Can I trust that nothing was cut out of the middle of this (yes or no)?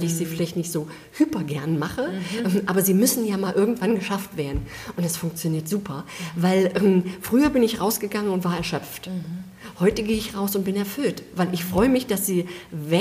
yes